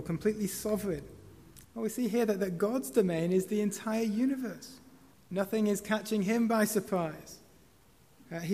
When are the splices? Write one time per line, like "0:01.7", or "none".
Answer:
0:01.6
0:05.1